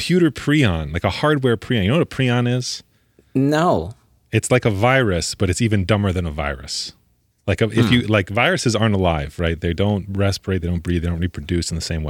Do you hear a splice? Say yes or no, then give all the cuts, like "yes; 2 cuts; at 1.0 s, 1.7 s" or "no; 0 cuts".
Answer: no; 0 cuts